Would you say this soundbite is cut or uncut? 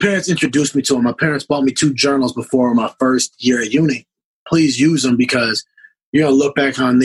cut